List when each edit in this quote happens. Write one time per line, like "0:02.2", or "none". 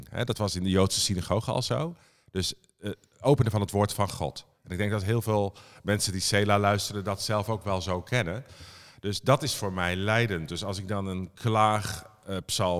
none